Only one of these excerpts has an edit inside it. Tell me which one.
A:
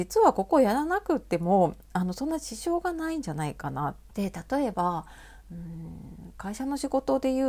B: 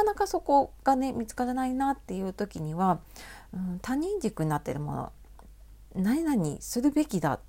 A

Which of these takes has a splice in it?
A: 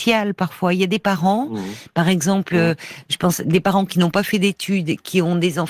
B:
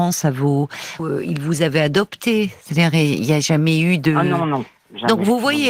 B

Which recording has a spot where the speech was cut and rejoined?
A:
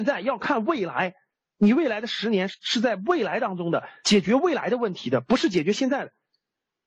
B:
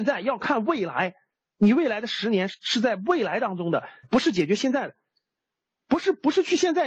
B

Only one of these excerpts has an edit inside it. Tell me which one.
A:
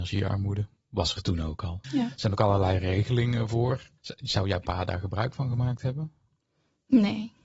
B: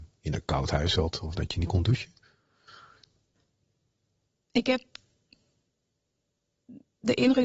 A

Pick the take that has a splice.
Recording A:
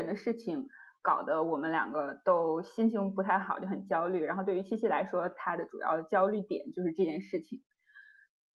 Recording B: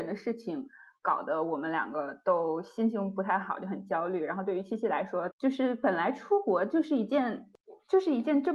B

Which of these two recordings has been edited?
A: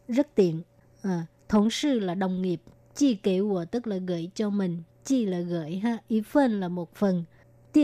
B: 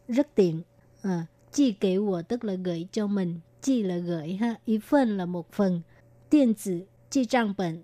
B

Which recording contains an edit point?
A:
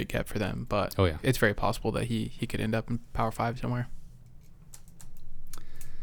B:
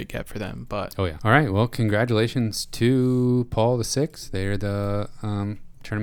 B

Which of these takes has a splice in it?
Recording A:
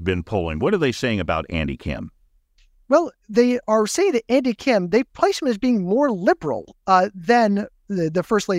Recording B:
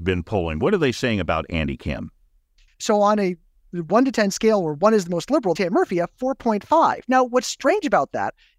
B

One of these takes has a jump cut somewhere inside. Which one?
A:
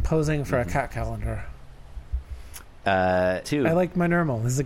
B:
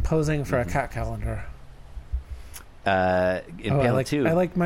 A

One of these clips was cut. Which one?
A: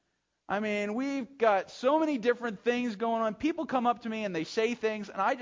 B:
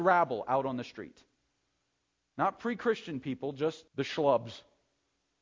B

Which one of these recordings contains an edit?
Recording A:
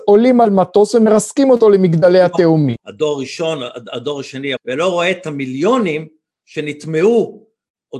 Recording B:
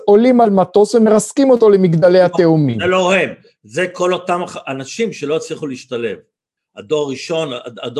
A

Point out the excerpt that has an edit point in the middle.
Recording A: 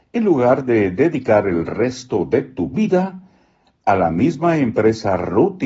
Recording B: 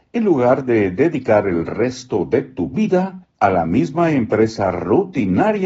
B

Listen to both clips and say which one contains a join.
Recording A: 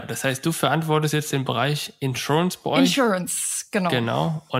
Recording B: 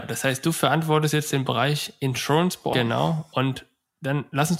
B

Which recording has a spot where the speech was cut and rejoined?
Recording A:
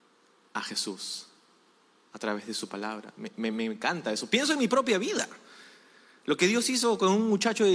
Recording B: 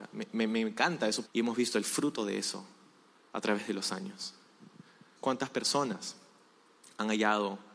B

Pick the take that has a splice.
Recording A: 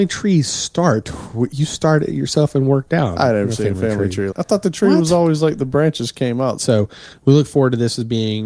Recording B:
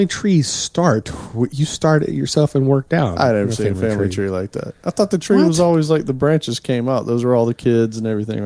A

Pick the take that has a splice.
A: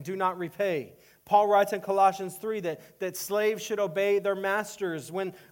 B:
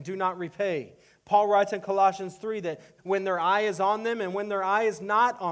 B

